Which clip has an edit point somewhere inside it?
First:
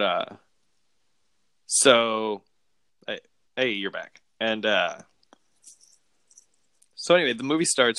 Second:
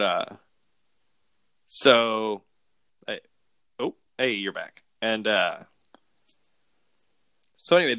first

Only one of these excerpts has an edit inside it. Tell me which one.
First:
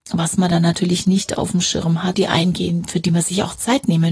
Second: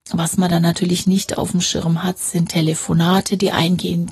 first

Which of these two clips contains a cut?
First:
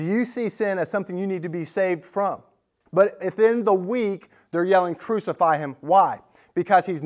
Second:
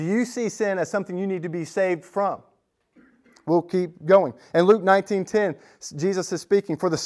first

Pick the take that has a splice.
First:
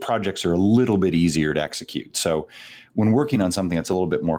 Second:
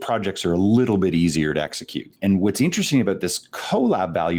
second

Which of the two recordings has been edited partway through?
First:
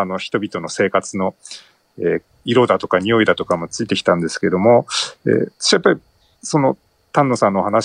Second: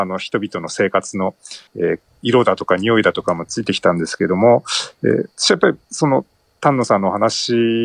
second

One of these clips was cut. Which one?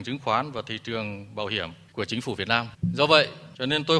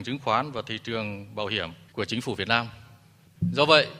first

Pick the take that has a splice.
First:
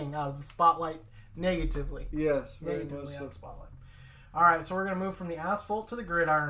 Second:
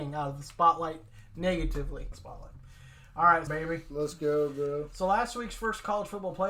second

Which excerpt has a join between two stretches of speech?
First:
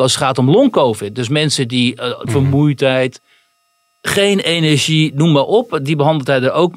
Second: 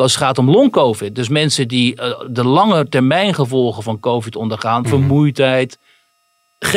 first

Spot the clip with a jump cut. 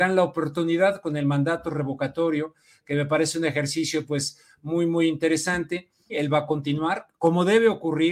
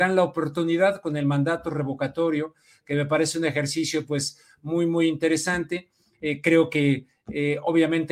first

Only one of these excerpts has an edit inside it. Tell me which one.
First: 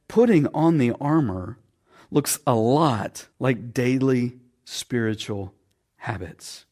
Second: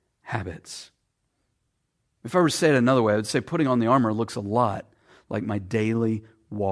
first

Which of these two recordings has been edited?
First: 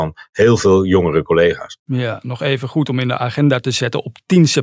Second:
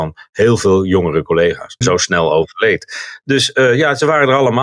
second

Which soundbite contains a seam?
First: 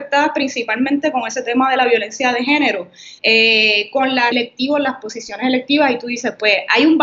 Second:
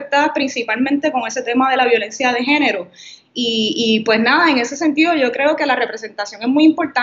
first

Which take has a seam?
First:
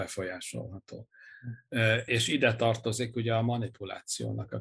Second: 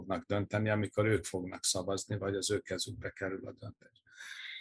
first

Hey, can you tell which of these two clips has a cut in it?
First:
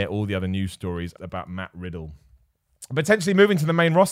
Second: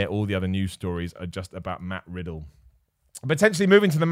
first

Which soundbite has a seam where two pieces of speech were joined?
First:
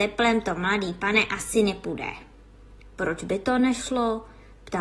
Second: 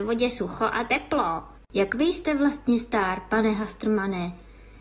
second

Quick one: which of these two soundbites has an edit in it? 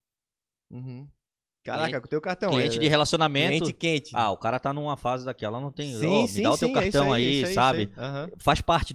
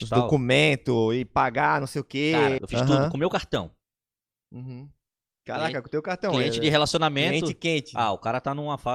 second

